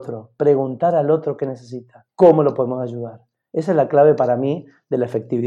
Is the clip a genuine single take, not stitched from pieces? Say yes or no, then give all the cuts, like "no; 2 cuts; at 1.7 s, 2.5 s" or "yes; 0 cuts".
no; 1 cut; at 2.1 s